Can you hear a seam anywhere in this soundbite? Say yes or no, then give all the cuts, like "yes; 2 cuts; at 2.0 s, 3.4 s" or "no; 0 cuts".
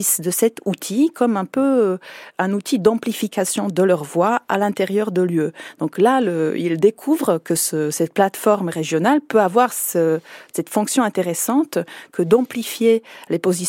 no; 0 cuts